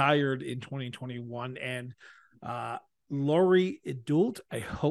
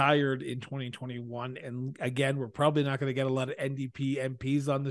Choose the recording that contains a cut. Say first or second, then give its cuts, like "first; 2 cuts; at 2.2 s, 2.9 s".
second; 1 cut; at 1.6 s